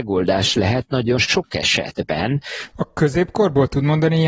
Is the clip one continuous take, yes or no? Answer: no